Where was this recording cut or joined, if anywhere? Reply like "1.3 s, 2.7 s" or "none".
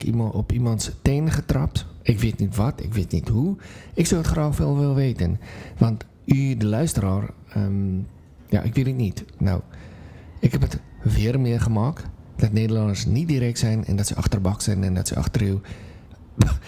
9.4 s